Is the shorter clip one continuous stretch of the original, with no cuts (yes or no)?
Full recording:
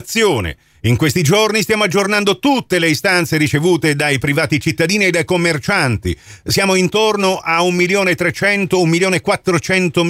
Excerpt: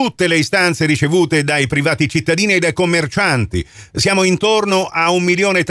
yes